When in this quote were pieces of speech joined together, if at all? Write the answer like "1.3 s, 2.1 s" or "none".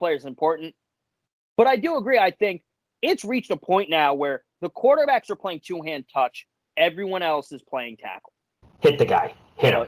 8.6 s